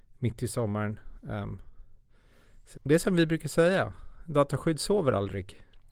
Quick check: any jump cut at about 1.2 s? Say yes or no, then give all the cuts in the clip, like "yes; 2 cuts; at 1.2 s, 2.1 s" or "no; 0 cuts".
no; 1 cut; at 2.7 s